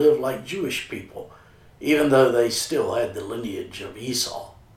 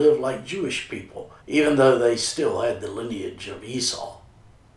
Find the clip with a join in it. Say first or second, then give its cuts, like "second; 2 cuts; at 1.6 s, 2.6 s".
second; 1 cut; at 1.4 s